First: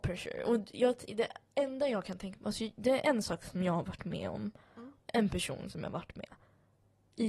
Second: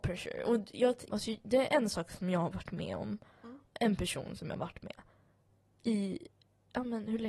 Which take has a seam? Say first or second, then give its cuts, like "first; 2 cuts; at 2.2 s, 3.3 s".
second; 1 cut; at 1.1 s